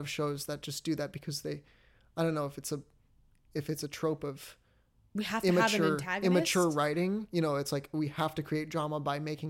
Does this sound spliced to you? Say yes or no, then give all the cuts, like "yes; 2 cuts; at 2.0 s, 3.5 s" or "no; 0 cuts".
no; 0 cuts